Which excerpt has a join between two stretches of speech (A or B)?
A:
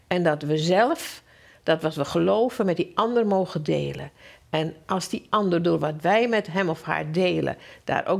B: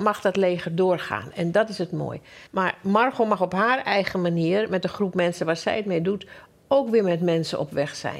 B